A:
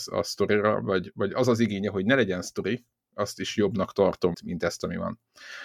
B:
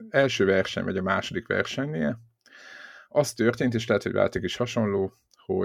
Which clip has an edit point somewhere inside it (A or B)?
A